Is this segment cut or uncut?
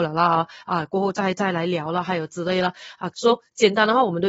cut